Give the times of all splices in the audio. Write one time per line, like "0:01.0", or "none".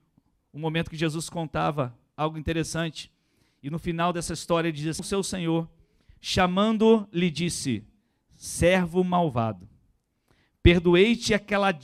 0:05.0